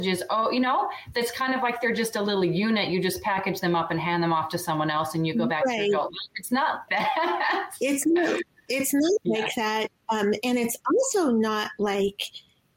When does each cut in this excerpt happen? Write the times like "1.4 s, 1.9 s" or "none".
6.9 s

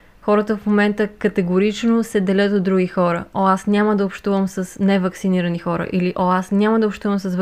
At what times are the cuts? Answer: none

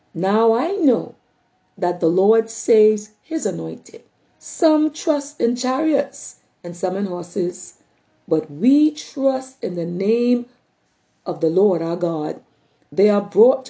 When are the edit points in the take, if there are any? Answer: 4.3 s

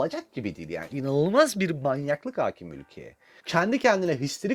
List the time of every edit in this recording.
3.4 s

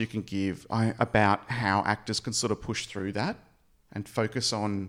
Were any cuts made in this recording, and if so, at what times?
1.0 s

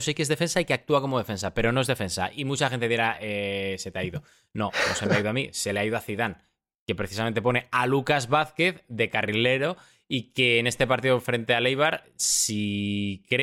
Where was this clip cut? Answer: none

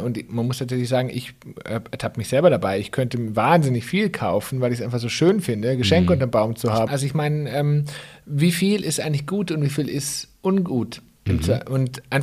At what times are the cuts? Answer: 6.9 s

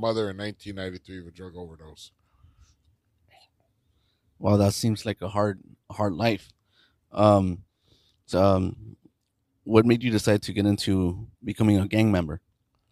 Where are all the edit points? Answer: 8.3 s, 11.3 s

